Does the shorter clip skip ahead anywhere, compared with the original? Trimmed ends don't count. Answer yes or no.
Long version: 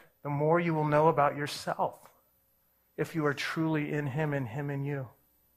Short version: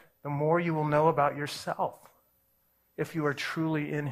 no